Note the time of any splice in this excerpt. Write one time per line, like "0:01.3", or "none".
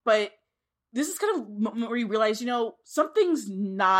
none